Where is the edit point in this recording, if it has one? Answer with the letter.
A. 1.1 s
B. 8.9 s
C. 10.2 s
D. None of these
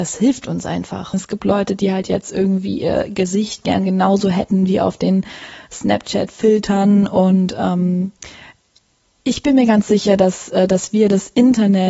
A